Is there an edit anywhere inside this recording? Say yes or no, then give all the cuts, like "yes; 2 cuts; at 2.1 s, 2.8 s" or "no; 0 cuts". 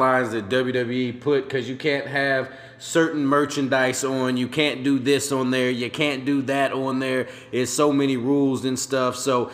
no; 0 cuts